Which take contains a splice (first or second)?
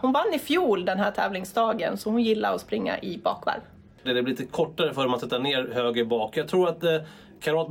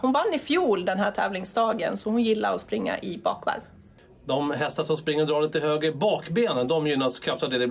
first